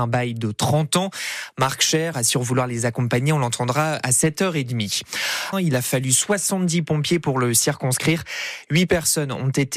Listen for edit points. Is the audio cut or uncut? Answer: cut